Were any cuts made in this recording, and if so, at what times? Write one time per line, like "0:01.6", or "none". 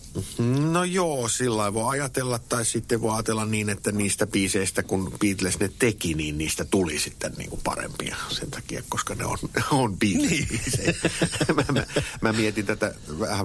none